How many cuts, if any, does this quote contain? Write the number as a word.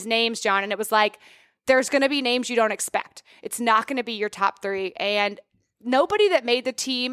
zero